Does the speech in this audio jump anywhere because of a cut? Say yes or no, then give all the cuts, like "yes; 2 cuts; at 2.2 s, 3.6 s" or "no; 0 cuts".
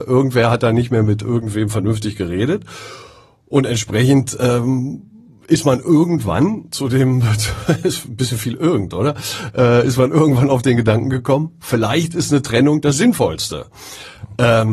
no; 0 cuts